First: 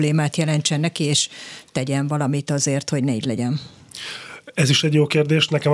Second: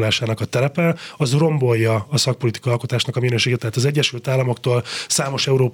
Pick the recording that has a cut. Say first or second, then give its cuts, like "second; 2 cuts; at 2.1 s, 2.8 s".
second; 1 cut; at 3.6 s